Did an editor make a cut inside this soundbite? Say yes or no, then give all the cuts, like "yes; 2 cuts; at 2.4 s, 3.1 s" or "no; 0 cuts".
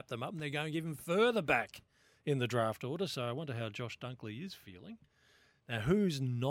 yes; 1 cut; at 5.6 s